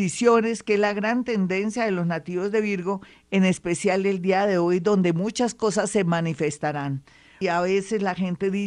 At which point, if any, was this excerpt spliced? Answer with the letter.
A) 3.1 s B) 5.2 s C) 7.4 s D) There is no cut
C